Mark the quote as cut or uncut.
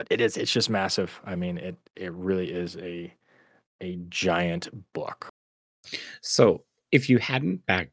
uncut